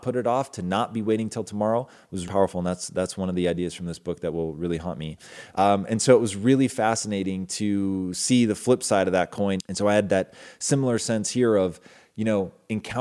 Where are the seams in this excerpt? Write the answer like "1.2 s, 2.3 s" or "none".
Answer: 2.3 s, 5.5 s, 9.6 s